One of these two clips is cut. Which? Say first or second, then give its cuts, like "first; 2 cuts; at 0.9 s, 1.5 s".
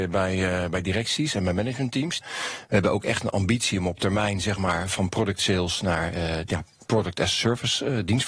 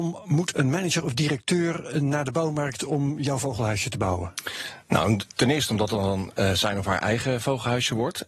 first; 1 cut; at 2.2 s